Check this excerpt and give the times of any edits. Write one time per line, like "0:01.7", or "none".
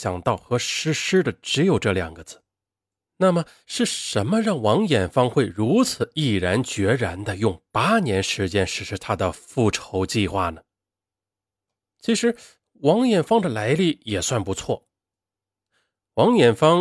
none